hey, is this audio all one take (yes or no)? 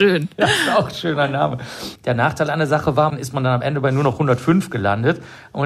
no